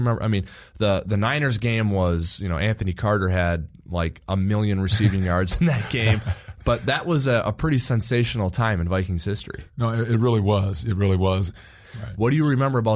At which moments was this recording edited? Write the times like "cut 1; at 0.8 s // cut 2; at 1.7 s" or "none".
cut 1; at 11.8 s